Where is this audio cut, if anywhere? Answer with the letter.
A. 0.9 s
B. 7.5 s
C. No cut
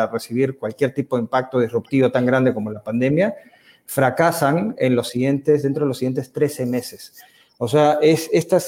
C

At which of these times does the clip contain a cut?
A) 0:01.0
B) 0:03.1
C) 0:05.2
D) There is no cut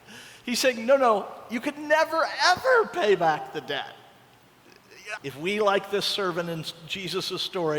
C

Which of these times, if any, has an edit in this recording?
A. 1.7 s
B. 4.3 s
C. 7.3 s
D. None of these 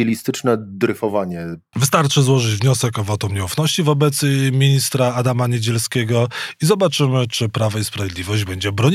A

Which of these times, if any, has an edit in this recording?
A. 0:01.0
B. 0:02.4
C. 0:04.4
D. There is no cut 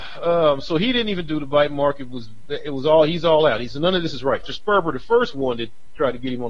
C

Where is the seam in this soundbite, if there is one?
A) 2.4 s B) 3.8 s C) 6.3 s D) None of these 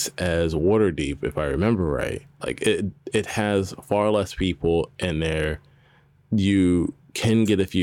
A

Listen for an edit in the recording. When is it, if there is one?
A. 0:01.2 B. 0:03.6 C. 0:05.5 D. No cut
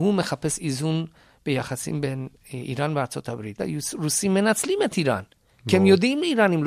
B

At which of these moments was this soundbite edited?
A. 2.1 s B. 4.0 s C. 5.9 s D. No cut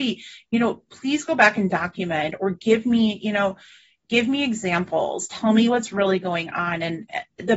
D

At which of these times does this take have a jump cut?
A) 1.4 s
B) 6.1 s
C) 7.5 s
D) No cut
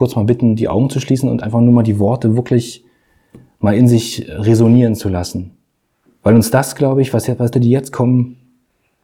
C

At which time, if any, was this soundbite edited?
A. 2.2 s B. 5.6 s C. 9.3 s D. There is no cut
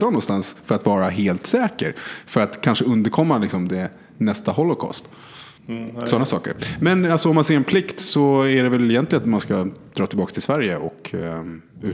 B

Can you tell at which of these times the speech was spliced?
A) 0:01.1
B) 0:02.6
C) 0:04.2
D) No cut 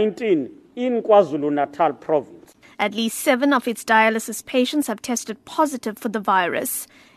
B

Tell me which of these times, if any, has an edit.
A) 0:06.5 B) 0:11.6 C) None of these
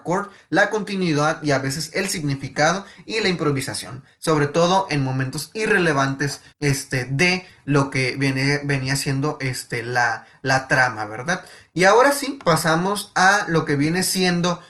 A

